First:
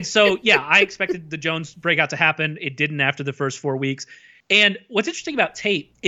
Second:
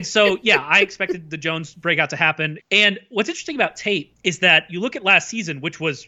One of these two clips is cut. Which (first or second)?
second